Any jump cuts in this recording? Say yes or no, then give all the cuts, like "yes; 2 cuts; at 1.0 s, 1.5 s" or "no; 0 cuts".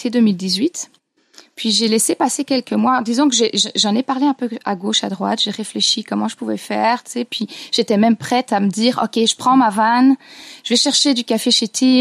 no; 0 cuts